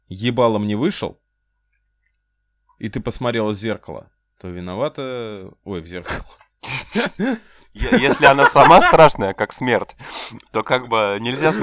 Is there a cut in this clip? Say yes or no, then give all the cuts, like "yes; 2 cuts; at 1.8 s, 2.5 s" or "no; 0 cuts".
no; 0 cuts